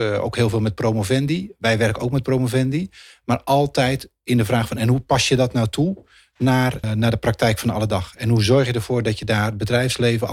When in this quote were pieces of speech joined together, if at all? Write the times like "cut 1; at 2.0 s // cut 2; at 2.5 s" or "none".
cut 1; at 6.8 s